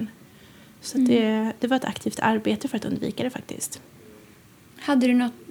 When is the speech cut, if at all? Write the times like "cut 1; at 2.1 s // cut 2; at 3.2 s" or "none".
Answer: none